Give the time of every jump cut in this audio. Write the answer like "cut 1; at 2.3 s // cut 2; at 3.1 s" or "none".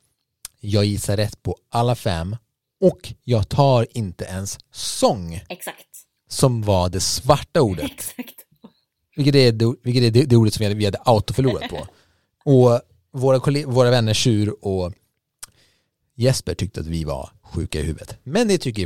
none